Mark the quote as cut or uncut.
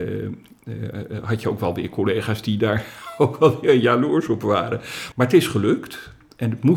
cut